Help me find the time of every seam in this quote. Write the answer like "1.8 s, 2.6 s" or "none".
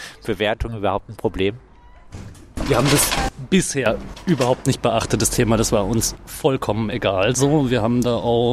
none